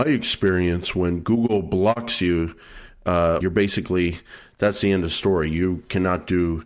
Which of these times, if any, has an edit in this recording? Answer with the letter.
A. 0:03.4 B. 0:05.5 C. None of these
A